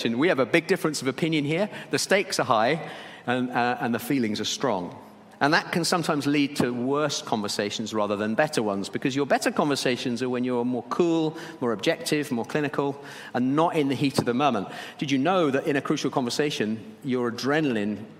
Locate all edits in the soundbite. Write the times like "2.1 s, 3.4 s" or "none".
none